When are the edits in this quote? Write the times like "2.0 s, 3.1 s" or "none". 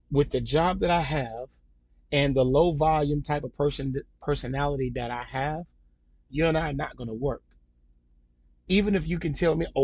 6.3 s